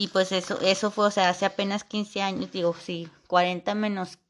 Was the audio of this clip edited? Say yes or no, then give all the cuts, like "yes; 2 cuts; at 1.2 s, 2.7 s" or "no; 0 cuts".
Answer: no; 0 cuts